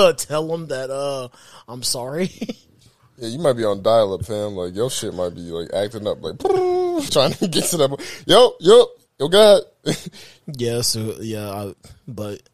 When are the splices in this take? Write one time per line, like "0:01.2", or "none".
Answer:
0:07.1
0:10.4